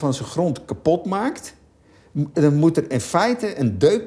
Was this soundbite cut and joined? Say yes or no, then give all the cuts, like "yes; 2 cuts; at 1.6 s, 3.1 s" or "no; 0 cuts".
no; 0 cuts